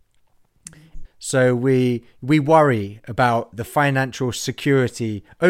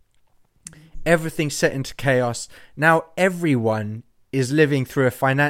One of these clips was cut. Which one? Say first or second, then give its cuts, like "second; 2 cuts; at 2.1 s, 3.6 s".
first; 1 cut; at 1.0 s